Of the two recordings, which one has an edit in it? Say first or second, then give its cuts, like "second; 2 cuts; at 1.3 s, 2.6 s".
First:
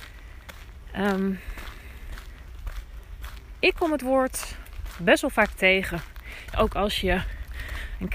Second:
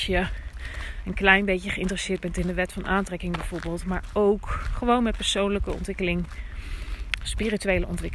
first; 1 cut; at 6.5 s